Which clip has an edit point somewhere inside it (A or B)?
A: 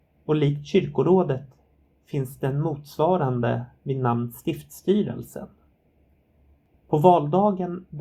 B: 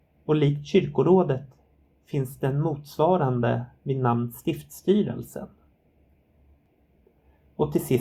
A